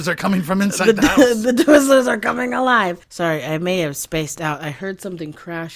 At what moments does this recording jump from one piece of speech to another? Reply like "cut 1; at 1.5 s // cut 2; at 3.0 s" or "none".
cut 1; at 3.0 s